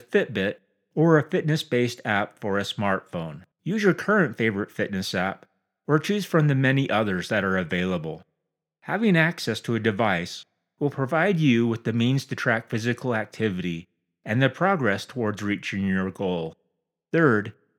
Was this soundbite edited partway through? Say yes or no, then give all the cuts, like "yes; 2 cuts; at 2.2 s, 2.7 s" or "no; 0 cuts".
yes; 1 cut; at 3.5 s